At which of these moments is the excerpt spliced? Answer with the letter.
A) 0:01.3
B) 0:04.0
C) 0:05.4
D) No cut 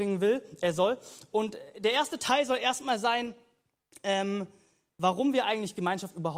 D